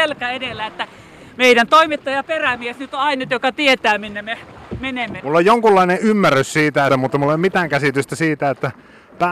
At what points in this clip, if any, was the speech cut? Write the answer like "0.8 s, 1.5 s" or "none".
5.2 s, 6.9 s